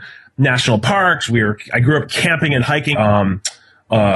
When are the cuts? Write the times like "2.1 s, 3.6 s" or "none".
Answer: 1.3 s, 2.9 s